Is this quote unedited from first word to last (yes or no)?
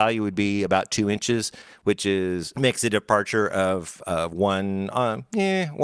no